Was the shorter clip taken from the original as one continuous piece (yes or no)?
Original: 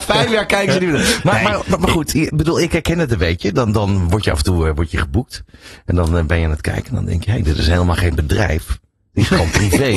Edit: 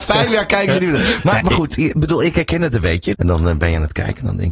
no